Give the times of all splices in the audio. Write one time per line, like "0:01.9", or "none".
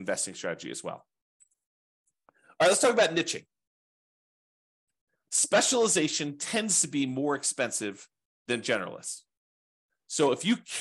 none